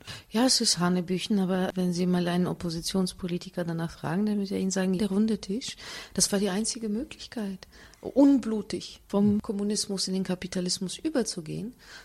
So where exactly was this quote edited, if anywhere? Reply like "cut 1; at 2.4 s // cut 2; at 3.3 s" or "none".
cut 1; at 5.0 s